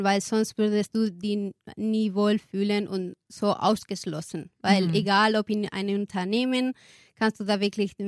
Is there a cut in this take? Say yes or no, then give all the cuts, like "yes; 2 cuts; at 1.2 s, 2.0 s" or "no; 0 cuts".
no; 0 cuts